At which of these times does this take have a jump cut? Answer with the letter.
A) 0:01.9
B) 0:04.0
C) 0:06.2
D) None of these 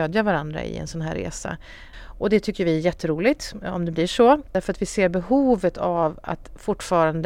A